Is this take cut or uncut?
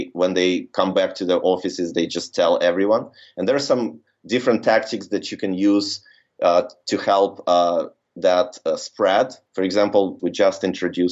cut